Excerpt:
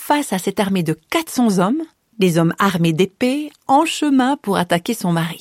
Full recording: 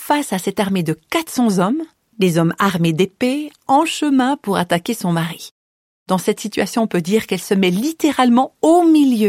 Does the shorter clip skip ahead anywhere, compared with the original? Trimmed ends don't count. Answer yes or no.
no